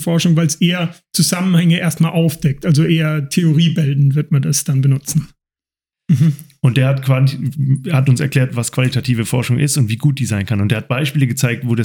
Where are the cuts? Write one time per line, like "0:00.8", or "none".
0:05.9